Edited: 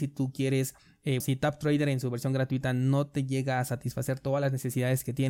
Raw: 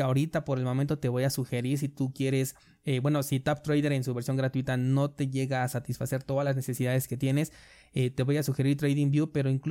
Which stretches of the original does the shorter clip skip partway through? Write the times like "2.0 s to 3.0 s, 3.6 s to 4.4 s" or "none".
3.0 s to 3.2 s